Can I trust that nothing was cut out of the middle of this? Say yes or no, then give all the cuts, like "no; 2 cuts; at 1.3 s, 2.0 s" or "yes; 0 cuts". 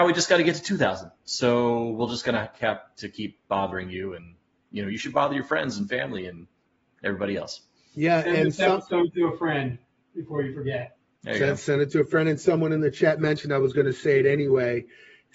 yes; 0 cuts